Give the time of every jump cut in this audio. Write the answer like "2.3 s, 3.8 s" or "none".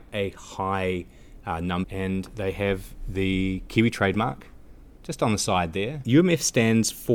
1.8 s, 6.0 s

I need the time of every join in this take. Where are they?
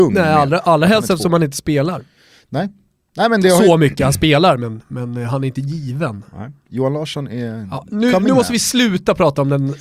none

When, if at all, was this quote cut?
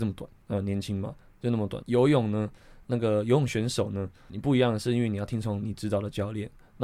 1.8 s

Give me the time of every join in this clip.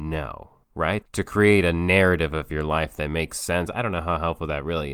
1.0 s, 3.7 s

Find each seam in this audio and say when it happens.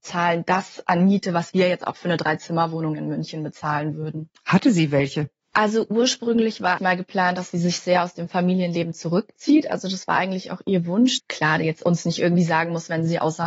4.3 s, 6.8 s, 11.2 s

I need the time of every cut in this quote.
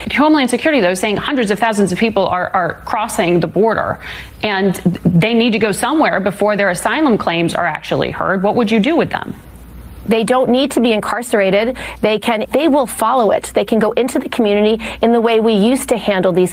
12.4 s

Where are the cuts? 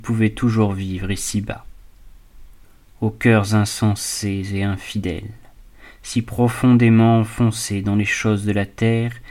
none

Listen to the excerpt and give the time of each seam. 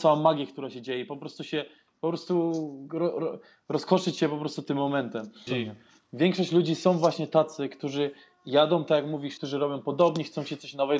5.5 s, 9.4 s

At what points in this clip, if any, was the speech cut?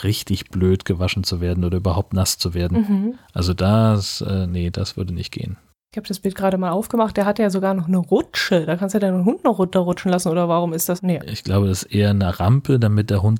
11.0 s

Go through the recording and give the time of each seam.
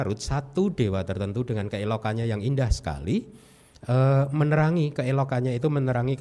none

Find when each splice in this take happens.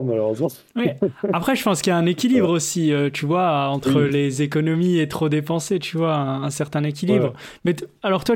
none

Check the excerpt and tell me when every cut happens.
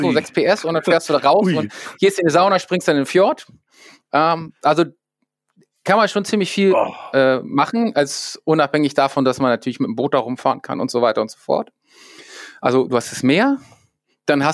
none

